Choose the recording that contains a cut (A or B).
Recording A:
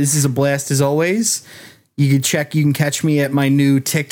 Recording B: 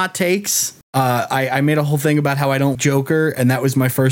B